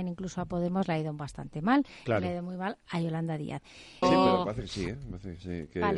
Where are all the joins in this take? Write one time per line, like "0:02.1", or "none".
0:04.0